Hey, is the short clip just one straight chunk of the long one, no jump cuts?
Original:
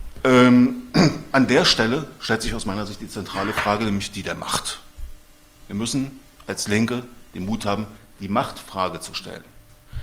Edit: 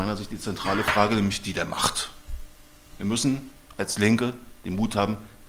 yes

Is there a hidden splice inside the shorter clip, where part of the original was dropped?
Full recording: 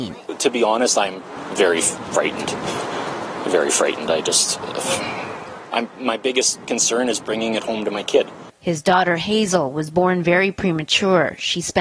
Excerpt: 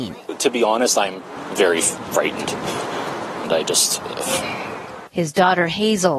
yes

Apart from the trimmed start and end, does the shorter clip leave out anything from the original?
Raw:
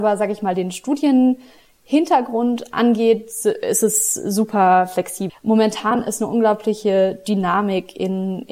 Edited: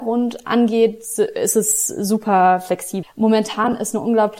no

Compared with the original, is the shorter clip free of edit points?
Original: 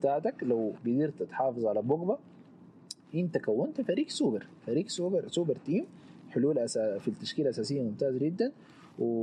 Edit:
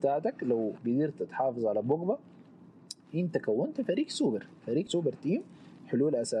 no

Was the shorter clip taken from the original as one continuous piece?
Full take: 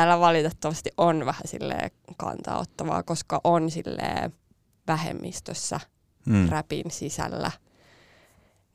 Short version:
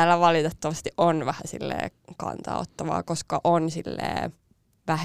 yes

